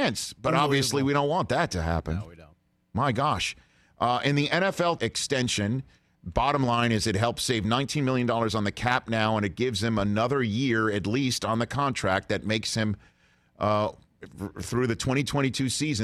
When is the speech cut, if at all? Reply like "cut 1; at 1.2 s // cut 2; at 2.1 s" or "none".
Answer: cut 1; at 5.0 s

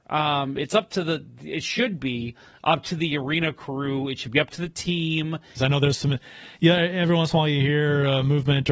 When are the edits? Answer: cut 1; at 5.6 s

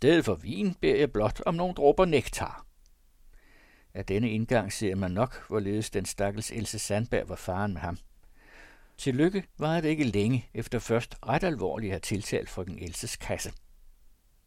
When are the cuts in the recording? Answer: cut 1; at 9.0 s // cut 2; at 10.5 s

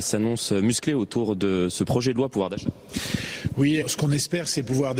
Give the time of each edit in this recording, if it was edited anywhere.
cut 1; at 3.8 s

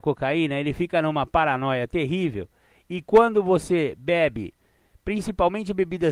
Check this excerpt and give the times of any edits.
none

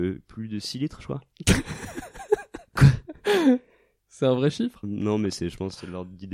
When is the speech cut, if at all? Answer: cut 1; at 4.8 s

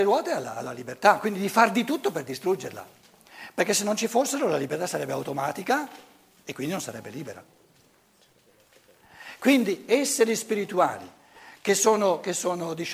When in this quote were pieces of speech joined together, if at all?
none

